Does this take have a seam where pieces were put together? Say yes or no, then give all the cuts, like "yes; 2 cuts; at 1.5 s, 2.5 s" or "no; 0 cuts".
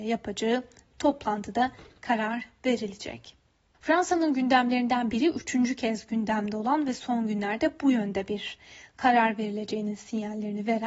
yes; 1 cut; at 3.7 s